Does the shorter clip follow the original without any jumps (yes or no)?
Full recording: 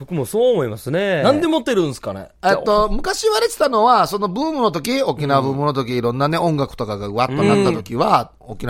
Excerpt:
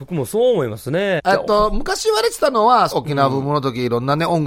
no